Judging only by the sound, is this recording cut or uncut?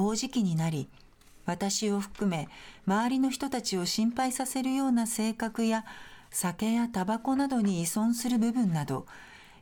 uncut